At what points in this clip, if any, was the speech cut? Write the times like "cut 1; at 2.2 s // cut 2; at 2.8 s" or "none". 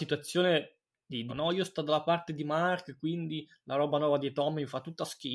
cut 1; at 1.3 s